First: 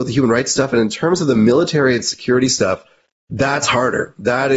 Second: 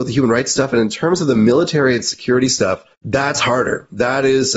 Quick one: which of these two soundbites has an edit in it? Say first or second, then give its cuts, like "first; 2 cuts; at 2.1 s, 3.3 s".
second; 1 cut; at 2.9 s